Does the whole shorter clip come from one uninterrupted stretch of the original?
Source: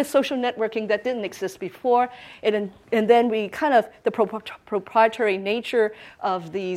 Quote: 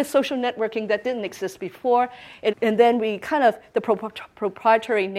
no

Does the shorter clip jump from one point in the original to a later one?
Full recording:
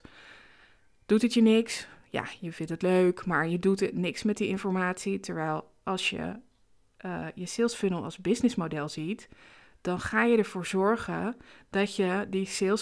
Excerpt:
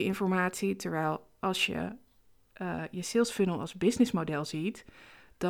no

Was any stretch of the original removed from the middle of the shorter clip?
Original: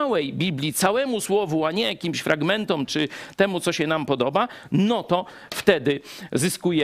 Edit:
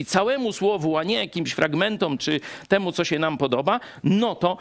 no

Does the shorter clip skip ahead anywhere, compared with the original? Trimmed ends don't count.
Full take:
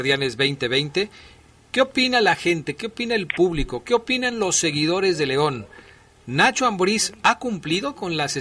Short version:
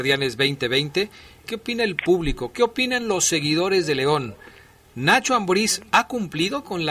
yes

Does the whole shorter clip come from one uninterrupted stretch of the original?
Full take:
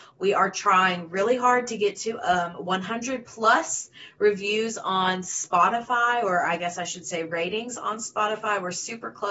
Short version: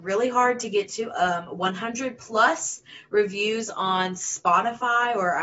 yes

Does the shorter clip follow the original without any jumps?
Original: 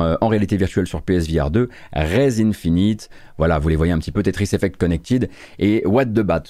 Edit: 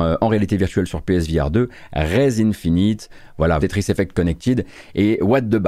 no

